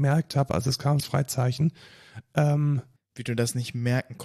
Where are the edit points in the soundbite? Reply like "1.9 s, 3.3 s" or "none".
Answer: 1.0 s, 3.0 s